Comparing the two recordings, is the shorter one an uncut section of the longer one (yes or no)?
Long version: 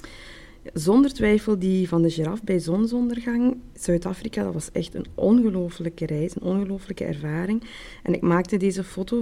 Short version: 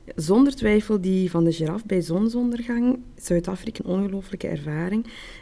no